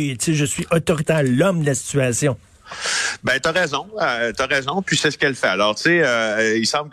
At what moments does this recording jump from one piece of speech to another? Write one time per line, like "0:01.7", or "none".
none